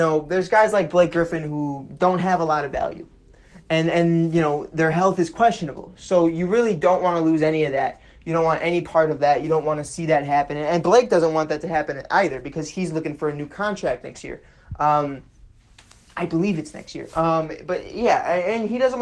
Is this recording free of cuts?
yes; 0 cuts

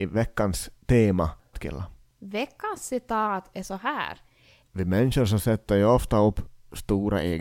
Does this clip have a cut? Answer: yes; 2 cuts; at 1.5 s, 4.6 s

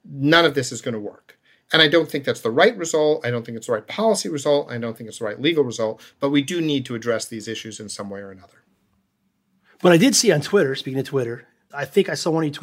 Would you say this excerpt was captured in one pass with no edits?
yes; 0 cuts

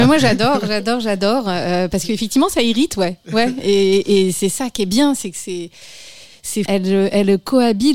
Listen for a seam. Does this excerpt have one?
yes; 1 cut; at 6.7 s

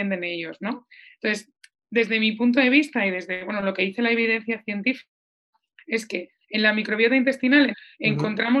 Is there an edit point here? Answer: yes; 1 cut; at 7.7 s

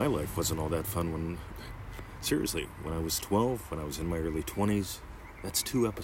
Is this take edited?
no; 0 cuts

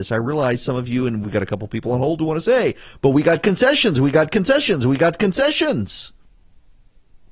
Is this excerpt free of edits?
yes; 0 cuts

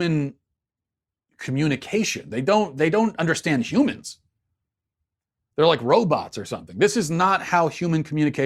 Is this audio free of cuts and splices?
yes; 0 cuts

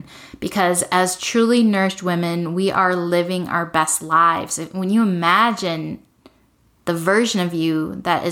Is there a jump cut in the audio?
no; 0 cuts

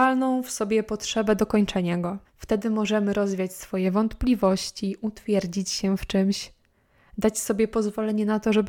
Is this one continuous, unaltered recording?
no; 1 cut; at 2.2 s

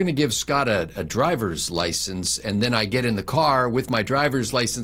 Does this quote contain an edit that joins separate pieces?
no; 0 cuts

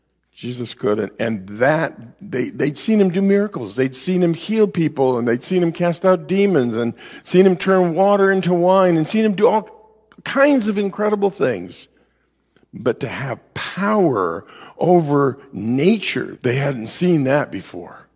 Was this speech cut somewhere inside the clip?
yes; 1 cut; at 16.4 s

